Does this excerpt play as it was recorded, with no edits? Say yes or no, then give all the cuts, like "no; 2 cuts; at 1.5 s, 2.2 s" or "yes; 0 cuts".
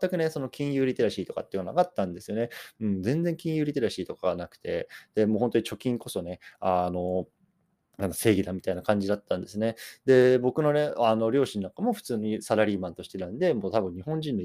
yes; 0 cuts